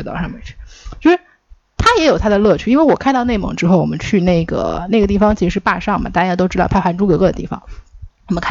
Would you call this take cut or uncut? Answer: uncut